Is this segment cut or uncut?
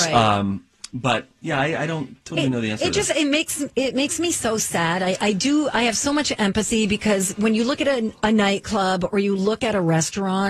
uncut